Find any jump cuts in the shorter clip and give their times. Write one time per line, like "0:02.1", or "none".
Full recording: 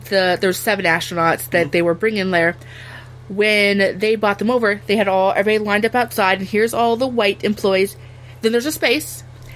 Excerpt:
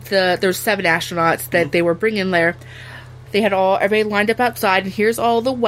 0:03.3